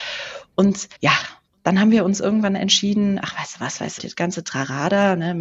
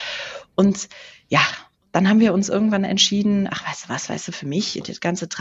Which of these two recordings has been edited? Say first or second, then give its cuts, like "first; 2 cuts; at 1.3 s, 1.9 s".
first; 2 cuts; at 0.9 s, 4.0 s